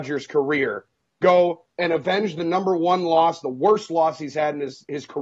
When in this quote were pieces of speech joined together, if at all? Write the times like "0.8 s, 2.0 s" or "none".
1.7 s